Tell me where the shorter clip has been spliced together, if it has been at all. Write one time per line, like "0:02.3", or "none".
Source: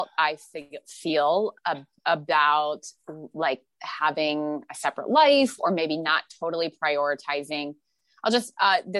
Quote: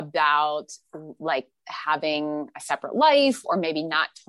none